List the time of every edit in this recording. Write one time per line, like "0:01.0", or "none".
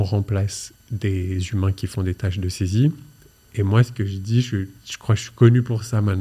none